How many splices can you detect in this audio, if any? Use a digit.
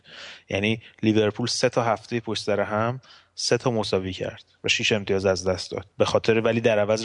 1